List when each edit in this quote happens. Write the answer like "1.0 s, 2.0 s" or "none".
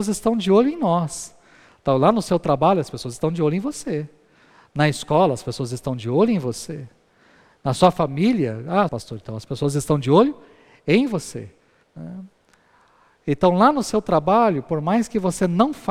8.9 s, 11.8 s